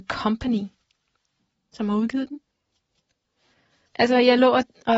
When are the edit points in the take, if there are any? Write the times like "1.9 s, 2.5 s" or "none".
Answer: 3.9 s